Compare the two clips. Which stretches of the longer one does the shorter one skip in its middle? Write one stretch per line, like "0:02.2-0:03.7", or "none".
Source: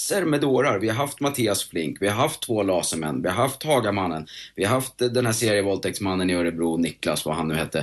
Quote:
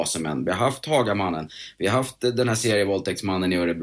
none